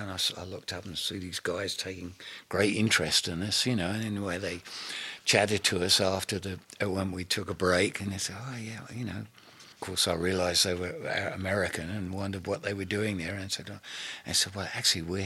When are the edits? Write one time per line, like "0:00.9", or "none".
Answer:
0:09.7